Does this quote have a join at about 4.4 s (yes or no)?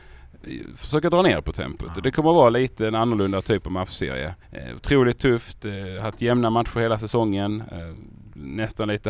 yes